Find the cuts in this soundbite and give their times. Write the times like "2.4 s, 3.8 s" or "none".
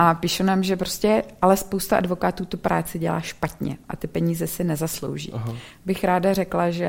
none